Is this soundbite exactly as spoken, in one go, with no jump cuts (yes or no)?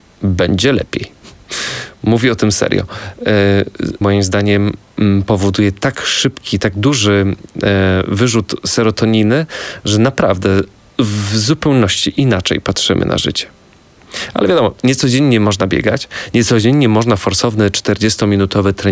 no